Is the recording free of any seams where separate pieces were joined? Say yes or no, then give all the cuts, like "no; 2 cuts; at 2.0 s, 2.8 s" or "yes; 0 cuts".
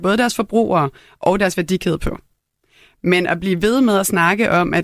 yes; 0 cuts